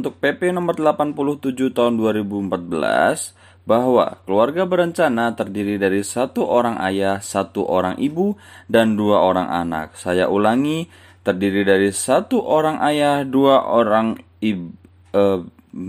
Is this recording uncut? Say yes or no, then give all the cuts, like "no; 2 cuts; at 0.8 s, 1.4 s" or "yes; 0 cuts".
yes; 0 cuts